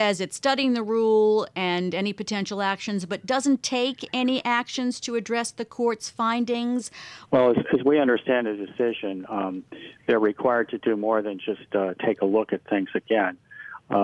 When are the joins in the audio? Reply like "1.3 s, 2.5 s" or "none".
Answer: 7.2 s